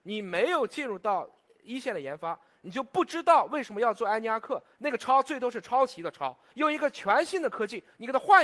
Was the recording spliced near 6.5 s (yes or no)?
yes